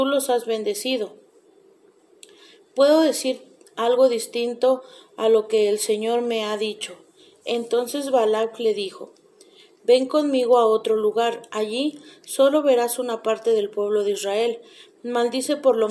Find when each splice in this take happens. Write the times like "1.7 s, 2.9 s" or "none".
none